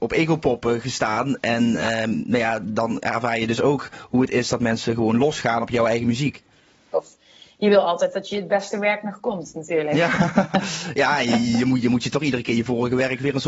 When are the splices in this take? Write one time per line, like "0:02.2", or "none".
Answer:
0:06.9